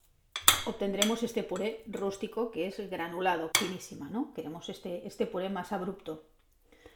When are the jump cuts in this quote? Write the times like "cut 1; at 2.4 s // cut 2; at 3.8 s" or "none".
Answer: cut 1; at 3.5 s